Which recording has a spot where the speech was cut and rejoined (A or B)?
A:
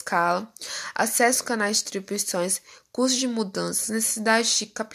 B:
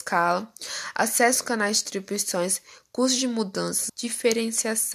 B